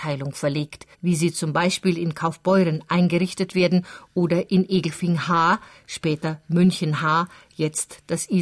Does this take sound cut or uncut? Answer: cut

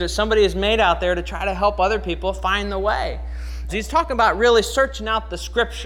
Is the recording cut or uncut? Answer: cut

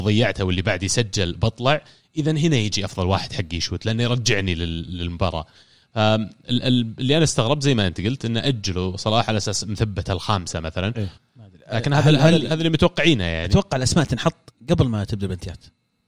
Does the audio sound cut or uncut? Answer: cut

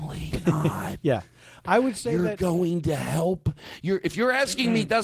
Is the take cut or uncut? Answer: uncut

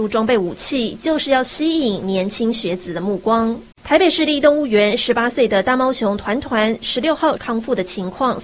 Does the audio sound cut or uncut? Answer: cut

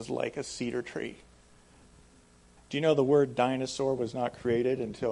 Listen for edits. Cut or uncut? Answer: cut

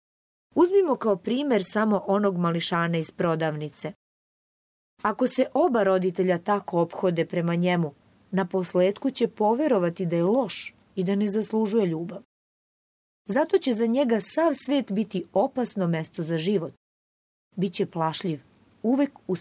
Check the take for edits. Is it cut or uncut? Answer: uncut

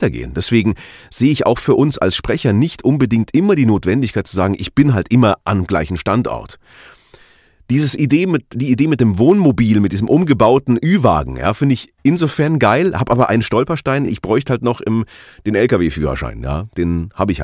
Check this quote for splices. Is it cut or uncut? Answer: uncut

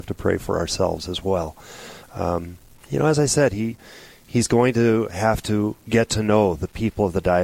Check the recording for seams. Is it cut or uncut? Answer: cut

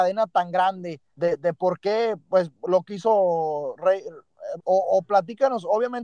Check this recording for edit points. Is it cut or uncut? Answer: cut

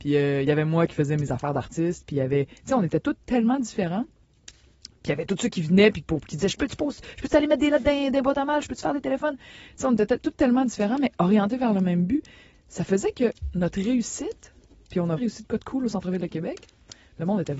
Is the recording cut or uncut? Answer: cut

